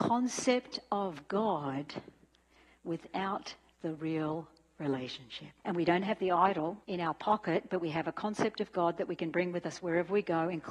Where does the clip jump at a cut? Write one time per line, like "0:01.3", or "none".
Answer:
0:05.6
0:06.8